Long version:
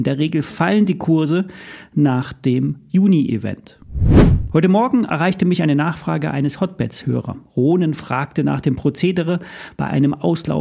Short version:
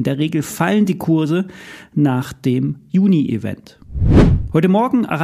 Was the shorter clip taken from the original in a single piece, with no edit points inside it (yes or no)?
yes